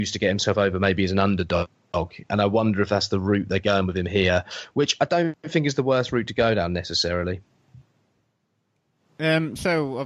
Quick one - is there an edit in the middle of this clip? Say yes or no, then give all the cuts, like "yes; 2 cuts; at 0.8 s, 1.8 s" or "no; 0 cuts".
no; 0 cuts